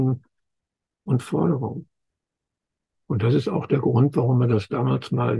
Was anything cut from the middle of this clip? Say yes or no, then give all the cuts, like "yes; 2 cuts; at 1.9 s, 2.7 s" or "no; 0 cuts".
yes; 1 cut; at 2.9 s